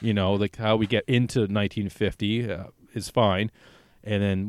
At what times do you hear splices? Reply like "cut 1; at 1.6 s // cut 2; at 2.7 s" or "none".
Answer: none